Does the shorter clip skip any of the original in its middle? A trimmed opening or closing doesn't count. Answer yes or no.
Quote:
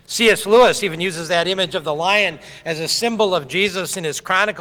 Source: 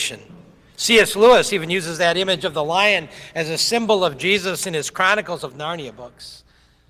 no